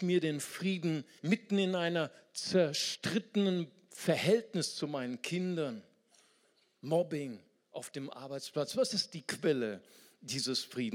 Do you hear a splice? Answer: yes; 1 cut; at 1.2 s

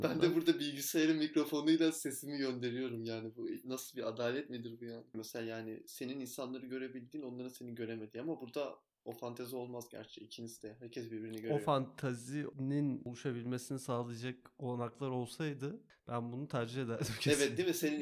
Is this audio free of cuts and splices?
no; 1 cut; at 5.1 s

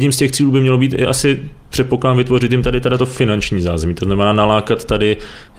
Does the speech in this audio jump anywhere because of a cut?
no; 0 cuts

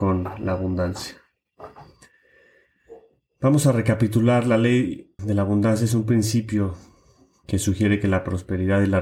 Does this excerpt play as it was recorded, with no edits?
no; 1 cut; at 5.2 s

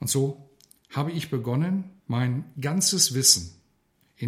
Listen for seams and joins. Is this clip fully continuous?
no; 1 cut; at 2.0 s

